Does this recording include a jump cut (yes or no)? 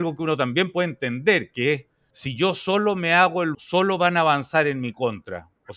yes